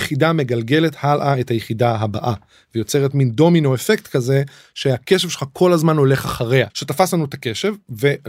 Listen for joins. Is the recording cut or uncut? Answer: cut